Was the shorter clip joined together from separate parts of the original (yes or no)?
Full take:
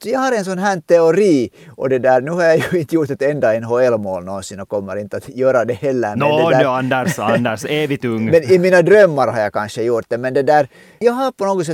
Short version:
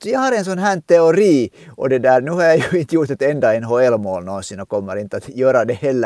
no